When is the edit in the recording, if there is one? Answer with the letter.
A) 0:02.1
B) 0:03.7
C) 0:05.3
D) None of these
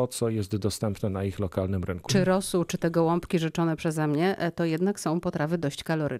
A